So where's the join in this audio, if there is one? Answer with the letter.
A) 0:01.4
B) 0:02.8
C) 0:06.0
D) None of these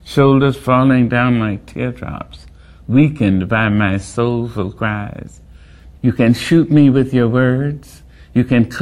C